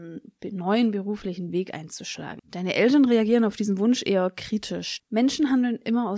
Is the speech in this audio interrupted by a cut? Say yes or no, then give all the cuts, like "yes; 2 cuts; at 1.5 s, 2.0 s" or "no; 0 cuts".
yes; 2 cuts; at 2.4 s, 5.0 s